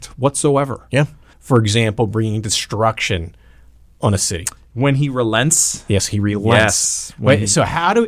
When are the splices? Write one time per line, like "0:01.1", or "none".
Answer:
0:01.3